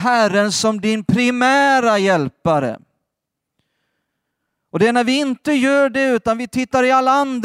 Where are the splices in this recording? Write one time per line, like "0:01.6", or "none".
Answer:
none